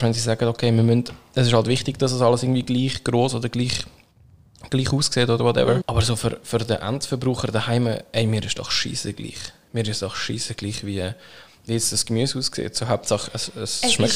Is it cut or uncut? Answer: cut